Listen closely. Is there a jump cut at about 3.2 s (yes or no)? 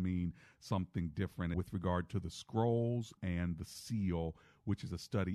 yes